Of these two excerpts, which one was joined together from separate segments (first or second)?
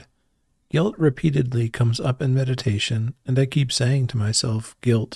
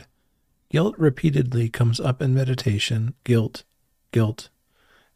second